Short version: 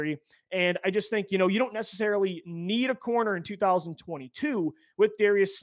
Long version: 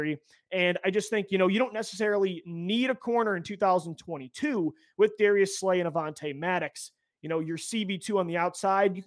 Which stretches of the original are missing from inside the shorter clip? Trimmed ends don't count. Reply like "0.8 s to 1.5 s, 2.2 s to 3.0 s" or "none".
none

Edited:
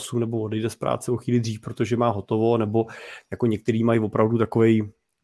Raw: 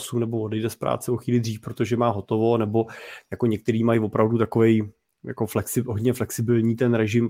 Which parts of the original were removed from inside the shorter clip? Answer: none

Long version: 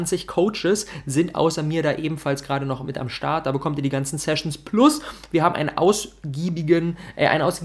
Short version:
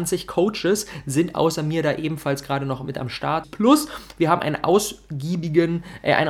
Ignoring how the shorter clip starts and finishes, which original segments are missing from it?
3.4 s to 4.6 s

